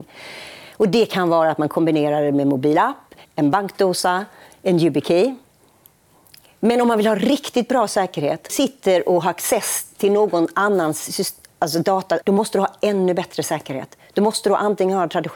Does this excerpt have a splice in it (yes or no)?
yes